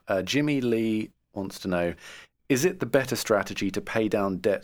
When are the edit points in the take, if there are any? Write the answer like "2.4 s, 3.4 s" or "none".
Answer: none